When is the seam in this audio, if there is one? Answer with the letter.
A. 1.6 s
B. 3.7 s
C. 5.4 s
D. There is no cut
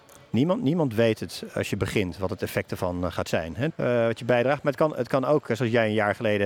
B